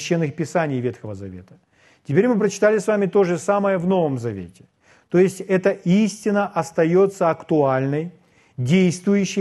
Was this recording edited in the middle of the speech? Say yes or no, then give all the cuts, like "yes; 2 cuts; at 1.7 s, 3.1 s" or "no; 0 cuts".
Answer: no; 0 cuts